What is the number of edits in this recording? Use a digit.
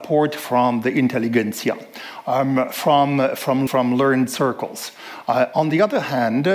2